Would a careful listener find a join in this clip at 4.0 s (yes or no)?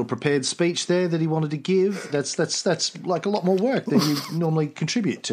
no